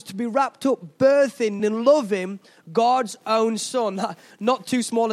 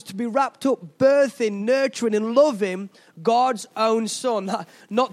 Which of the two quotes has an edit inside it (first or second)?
first